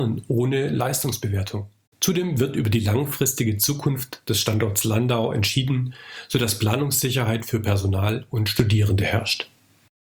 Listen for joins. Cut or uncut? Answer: cut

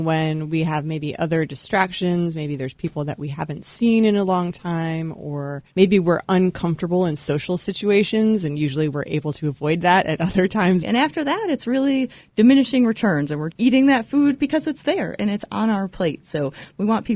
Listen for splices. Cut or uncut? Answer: cut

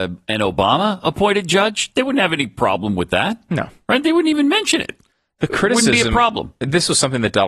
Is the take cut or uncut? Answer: uncut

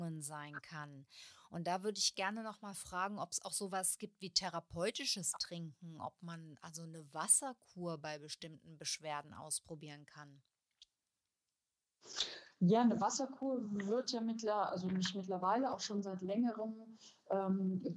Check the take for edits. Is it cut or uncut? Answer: uncut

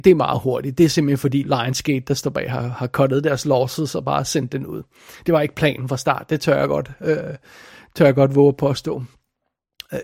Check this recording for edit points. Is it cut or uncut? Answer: cut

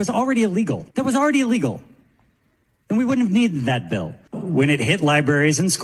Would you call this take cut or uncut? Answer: cut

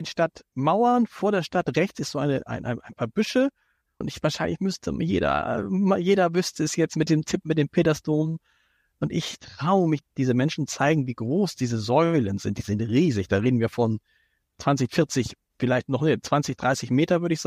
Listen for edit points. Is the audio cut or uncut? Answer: cut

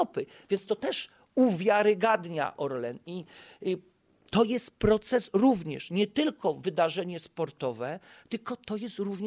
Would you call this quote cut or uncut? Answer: uncut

